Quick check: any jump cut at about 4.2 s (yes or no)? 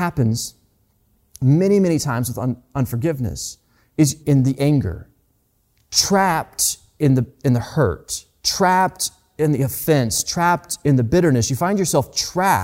yes